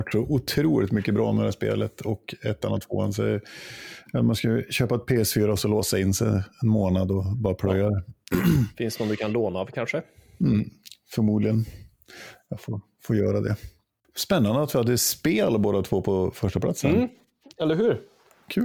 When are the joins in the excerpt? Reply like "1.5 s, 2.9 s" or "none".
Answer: none